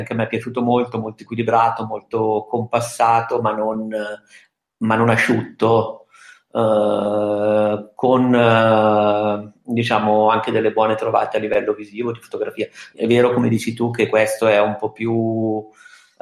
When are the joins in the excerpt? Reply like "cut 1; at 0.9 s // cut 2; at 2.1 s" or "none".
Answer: cut 1; at 12.9 s